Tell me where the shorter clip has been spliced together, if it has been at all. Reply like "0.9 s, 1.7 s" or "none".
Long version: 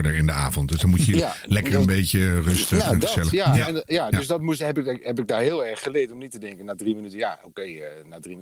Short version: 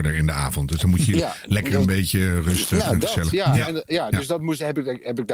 none